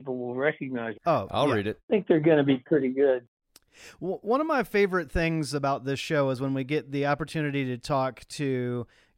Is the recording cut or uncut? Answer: cut